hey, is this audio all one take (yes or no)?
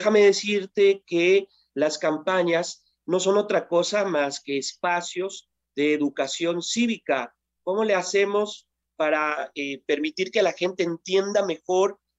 yes